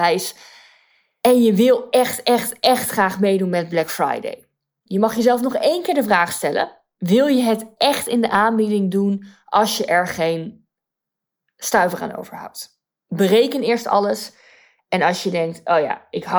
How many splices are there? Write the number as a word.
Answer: one